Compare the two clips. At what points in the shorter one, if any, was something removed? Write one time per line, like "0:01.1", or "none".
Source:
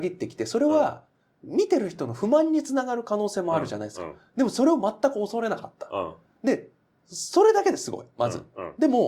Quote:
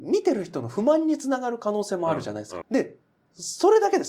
0:02.6